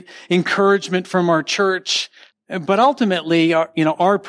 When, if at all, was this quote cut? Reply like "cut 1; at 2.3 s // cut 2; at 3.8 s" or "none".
cut 1; at 2.3 s